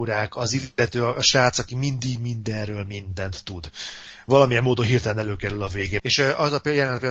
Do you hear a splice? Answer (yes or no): yes